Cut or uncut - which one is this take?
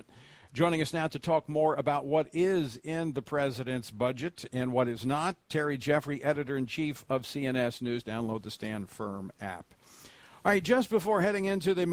cut